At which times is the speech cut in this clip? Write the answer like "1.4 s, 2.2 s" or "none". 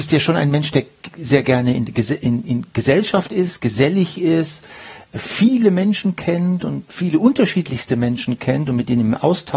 none